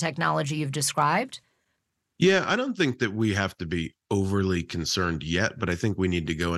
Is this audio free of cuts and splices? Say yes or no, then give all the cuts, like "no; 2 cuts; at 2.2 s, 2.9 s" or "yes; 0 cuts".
yes; 0 cuts